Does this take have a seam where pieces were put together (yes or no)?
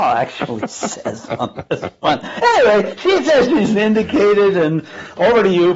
no